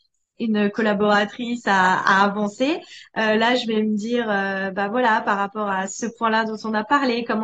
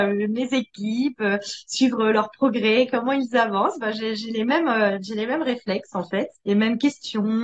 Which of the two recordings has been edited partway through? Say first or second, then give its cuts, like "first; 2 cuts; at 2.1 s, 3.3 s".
second; 1 cut; at 6.4 s